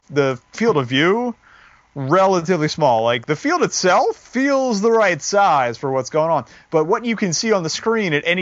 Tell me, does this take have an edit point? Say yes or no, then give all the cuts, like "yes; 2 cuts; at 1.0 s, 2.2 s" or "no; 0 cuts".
no; 0 cuts